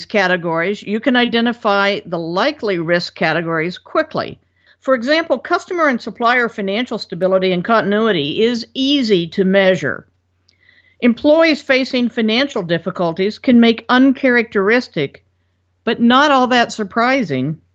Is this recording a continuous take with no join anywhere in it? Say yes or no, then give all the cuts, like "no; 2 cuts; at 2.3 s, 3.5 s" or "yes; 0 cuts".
no; 2 cuts; at 4.7 s, 10.8 s